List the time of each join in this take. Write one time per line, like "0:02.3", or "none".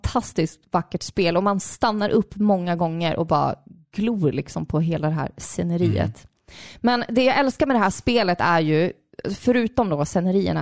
none